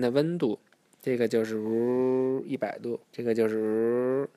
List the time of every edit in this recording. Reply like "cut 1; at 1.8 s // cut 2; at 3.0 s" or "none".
cut 1; at 3.0 s